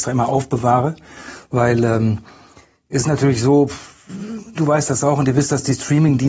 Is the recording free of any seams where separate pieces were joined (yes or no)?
yes